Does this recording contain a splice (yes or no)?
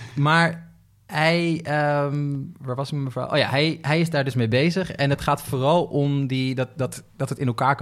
no